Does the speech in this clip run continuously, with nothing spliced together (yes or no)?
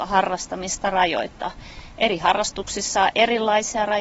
yes